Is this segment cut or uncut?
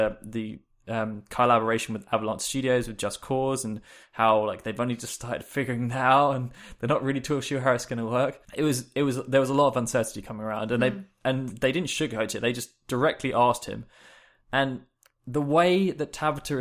cut